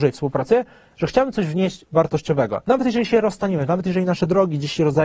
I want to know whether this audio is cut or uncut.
uncut